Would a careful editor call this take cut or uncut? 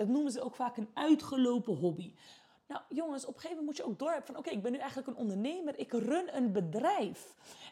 uncut